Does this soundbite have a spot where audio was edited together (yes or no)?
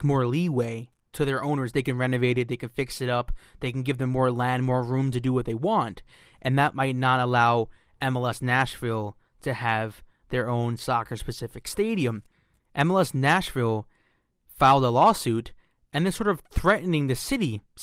no